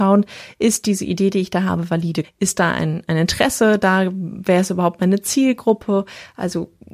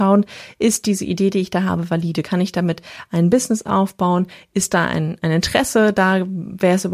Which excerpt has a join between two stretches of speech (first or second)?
first